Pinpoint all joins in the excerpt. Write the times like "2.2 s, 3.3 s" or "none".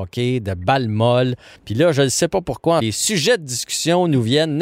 1.6 s, 2.8 s

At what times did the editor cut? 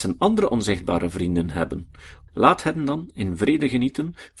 2.3 s

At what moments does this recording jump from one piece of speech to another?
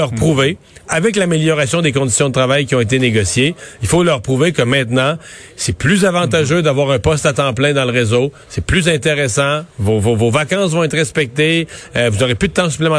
none

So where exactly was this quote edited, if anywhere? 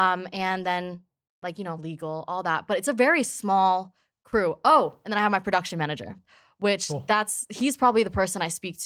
1.8 s

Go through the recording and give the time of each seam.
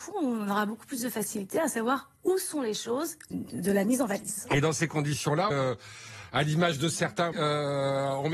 3.3 s, 5.5 s, 7.3 s

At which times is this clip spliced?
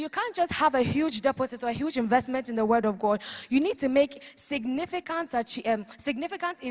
none

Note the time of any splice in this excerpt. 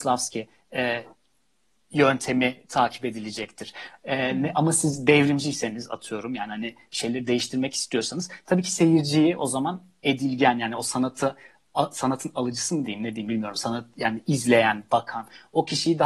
none

